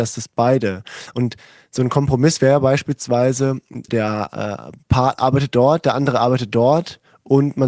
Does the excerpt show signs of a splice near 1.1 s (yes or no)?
no